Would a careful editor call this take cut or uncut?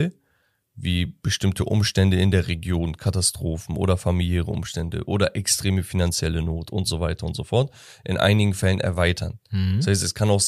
uncut